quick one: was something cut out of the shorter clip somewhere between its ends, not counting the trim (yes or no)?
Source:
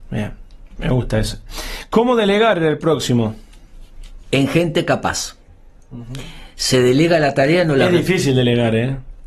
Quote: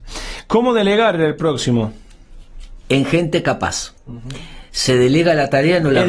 yes